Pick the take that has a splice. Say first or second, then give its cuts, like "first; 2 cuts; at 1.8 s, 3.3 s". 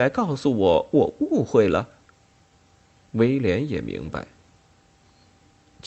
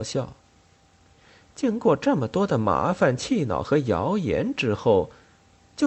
first; 1 cut; at 3.0 s